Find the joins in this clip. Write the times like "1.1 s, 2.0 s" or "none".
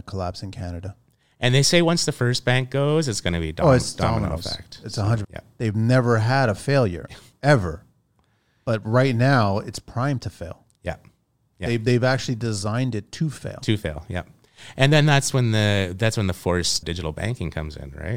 5.2 s, 16.8 s